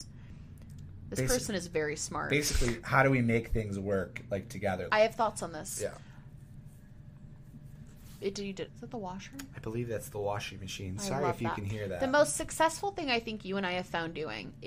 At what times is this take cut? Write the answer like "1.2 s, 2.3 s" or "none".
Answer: 4.9 s, 8.7 s